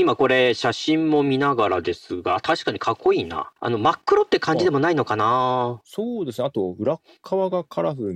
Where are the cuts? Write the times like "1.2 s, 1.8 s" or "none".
3.6 s, 5.8 s

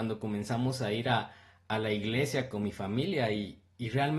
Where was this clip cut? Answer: none

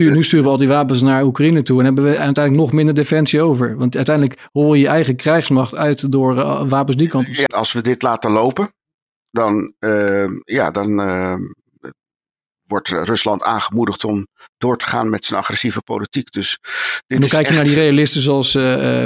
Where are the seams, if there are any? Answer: 7.5 s

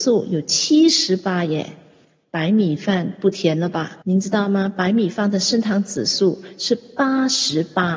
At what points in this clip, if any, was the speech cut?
4.0 s

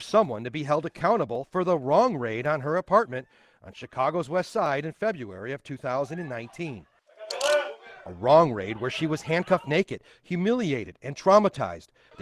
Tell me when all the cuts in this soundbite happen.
none

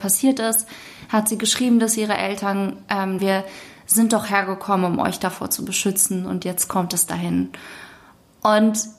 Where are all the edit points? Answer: 3.2 s

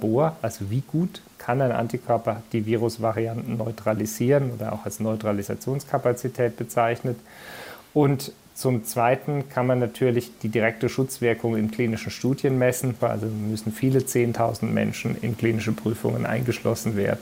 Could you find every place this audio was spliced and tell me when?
13.0 s

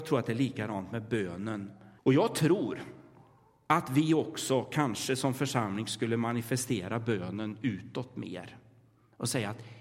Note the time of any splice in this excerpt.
2.0 s

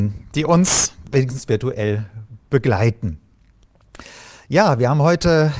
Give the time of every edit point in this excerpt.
none

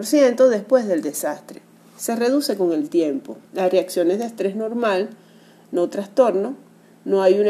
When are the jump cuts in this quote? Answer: 3.5 s

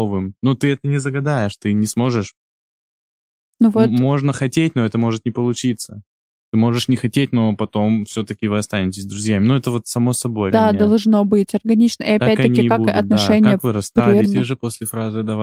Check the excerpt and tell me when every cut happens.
10.5 s, 14.2 s

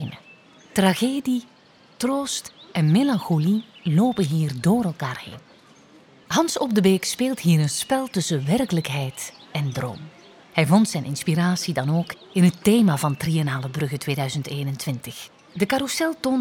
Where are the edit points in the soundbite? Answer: 15.5 s

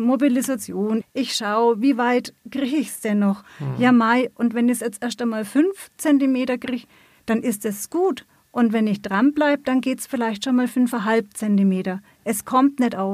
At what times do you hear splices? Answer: 1.0 s

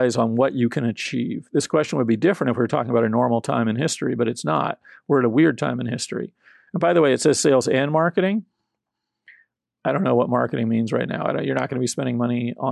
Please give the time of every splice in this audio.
6.7 s

